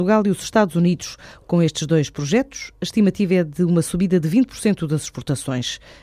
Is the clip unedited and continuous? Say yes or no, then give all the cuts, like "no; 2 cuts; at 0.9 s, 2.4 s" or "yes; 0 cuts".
no; 1 cut; at 1.4 s